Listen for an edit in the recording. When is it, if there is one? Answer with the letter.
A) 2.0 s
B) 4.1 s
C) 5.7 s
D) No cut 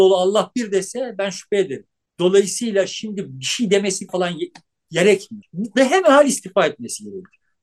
B